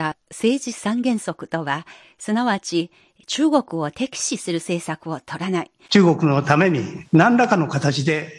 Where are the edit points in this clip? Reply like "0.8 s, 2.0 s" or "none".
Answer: 5.9 s